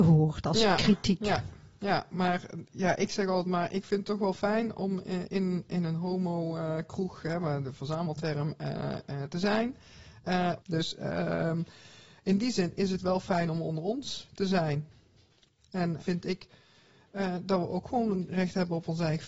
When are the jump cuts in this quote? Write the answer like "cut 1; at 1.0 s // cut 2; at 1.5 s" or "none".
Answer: cut 1; at 10.6 s // cut 2; at 16.0 s